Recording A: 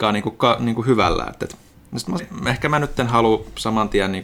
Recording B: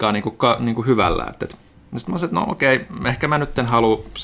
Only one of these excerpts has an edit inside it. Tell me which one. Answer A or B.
A